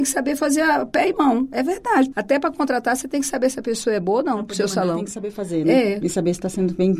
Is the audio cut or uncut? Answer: cut